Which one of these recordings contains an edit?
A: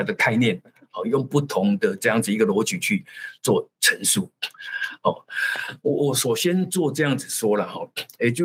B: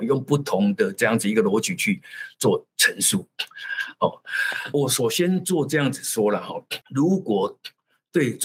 B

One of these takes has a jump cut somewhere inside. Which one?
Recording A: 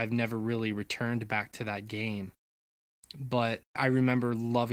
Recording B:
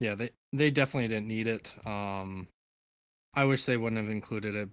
A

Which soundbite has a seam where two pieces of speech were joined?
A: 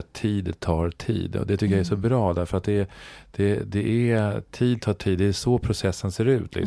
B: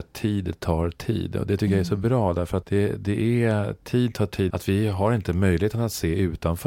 B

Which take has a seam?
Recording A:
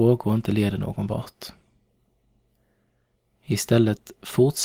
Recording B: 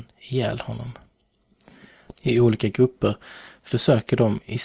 B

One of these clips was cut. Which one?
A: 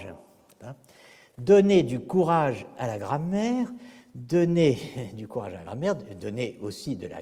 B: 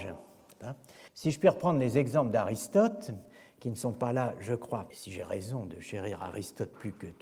B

